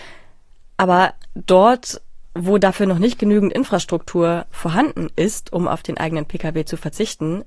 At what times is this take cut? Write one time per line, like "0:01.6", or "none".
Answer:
none